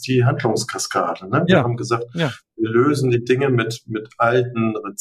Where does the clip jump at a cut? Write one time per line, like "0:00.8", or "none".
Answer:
0:01.5